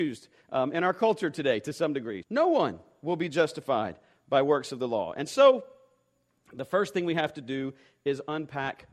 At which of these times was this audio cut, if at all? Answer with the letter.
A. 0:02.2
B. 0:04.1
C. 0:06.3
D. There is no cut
A